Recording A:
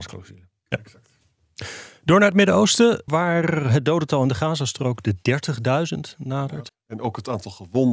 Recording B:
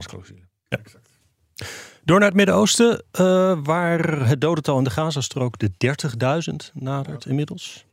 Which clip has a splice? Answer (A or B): A